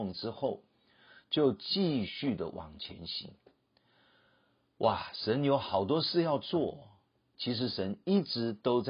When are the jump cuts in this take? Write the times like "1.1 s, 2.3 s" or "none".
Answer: none

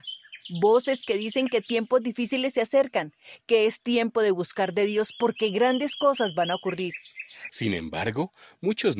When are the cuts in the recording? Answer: 7.5 s

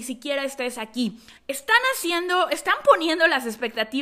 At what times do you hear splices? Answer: 1.4 s

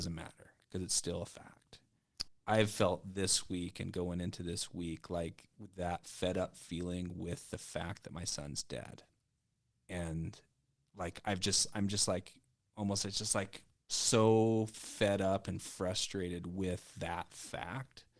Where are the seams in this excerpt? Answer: 2.3 s

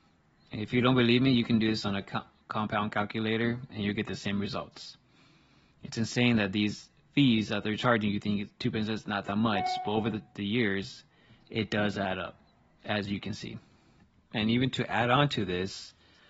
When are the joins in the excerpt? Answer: none

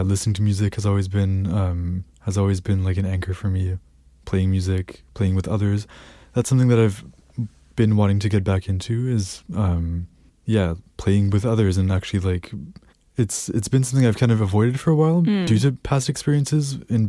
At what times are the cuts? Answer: none

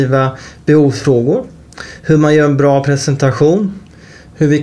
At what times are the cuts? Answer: none

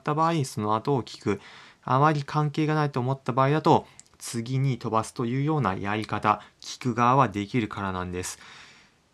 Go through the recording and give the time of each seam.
none

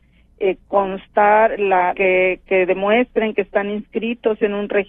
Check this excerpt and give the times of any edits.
1.9 s

